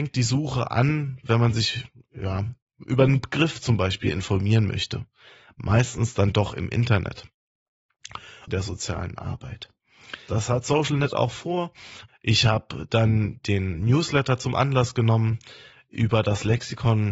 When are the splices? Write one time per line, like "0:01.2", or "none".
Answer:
0:08.5
0:10.3
0:12.1